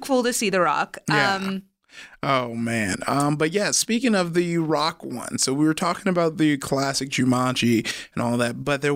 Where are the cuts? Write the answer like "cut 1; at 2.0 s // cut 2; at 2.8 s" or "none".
none

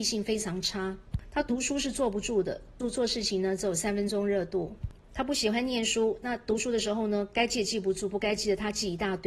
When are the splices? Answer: cut 1; at 2.8 s

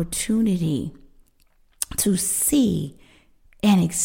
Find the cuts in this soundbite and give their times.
none

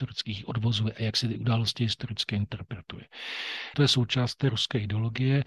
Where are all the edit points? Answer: cut 1; at 3.7 s

